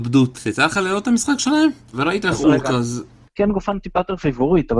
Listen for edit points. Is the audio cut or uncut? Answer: cut